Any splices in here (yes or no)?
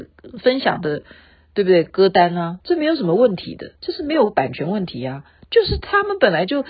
no